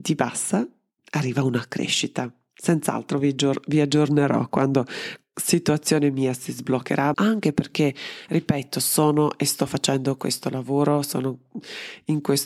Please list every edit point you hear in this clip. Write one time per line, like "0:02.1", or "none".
0:07.1